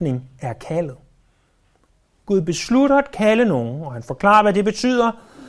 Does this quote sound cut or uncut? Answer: uncut